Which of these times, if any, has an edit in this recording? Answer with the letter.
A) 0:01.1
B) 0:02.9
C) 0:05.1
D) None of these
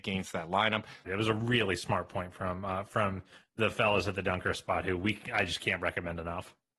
A